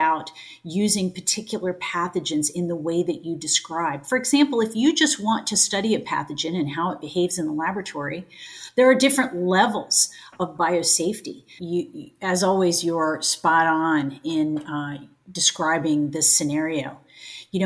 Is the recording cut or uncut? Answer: cut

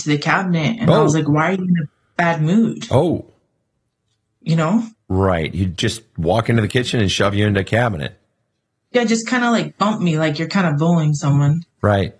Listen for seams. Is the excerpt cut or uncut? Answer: cut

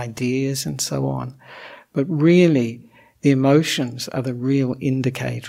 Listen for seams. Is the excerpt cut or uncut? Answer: uncut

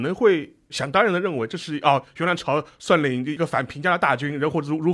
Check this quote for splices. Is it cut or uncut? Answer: uncut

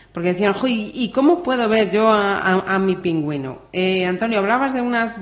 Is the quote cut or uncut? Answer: uncut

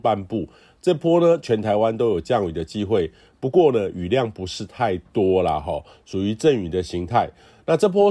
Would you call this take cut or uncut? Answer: uncut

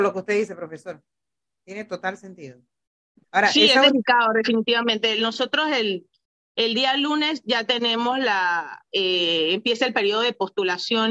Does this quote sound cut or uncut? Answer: uncut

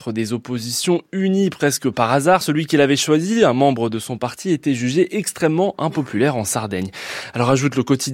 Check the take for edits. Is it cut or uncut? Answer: cut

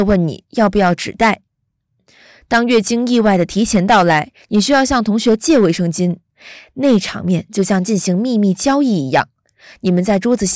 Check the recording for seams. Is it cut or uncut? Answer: uncut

